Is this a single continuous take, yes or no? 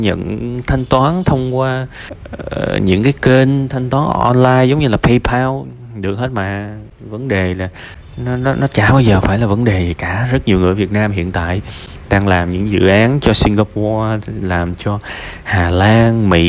yes